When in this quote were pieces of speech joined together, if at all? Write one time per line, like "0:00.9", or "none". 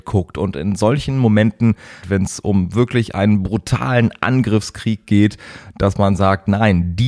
0:02.0